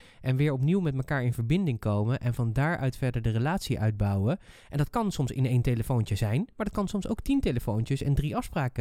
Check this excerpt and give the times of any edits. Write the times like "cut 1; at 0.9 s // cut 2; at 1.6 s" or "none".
none